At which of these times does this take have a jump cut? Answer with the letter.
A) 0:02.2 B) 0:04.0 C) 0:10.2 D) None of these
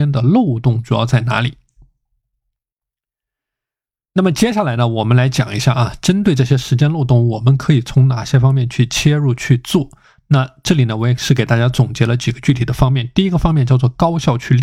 D